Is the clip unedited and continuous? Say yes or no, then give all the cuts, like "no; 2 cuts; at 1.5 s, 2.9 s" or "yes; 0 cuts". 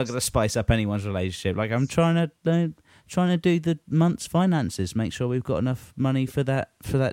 yes; 0 cuts